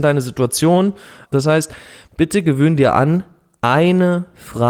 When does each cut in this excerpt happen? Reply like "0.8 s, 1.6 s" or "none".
1.3 s